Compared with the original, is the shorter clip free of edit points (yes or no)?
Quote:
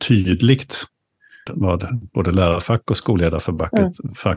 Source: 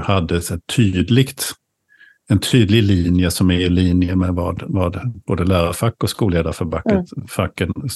no